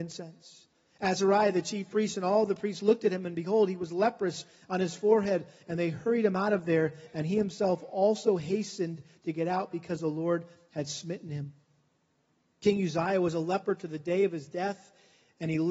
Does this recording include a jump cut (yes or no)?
no